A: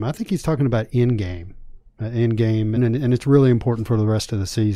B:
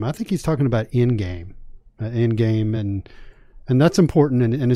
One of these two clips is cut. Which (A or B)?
A